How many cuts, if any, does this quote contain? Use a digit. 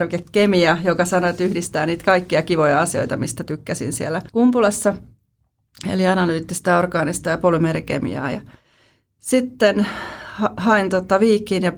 0